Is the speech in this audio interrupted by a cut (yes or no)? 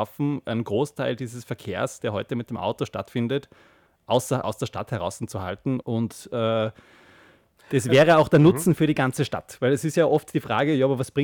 yes